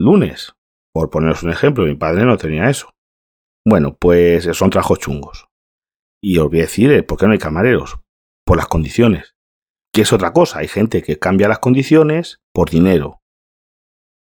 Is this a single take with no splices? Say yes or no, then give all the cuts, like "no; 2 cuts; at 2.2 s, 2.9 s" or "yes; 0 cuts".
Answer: no; 2 cuts; at 9.8 s, 12.4 s